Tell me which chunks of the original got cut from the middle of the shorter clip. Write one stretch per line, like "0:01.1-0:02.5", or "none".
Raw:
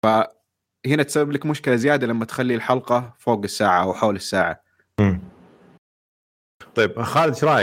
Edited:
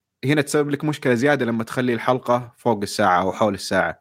none

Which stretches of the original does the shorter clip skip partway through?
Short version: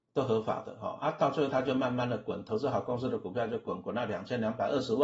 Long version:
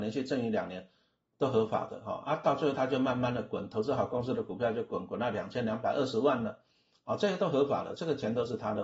none

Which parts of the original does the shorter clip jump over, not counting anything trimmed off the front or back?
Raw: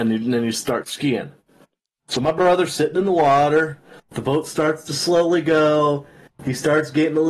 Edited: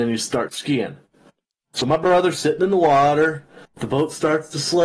none

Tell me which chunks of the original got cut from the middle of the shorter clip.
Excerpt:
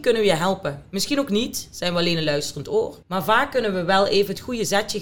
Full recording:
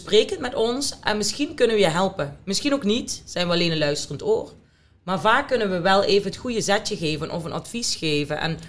0:04.6-0:05.0

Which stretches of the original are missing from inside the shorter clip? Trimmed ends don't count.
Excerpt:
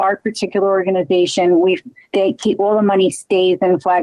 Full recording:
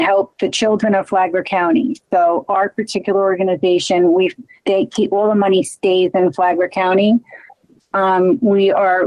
none

